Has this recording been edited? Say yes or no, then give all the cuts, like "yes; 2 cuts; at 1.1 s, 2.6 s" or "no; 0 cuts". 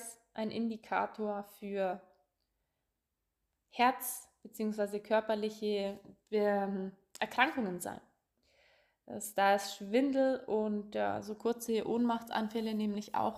no; 0 cuts